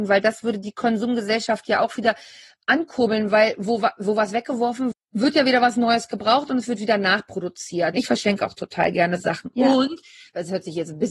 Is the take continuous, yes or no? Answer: no